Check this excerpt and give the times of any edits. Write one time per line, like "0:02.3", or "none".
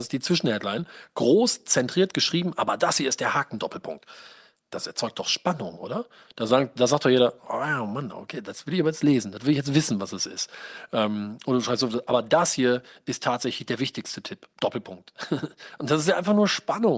none